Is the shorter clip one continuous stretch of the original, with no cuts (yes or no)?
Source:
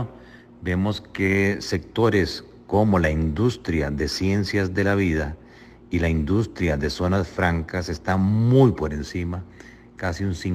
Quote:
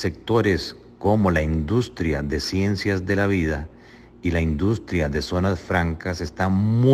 yes